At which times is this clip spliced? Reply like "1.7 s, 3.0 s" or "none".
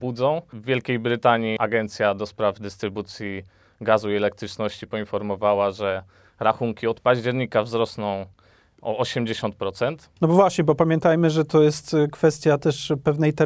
none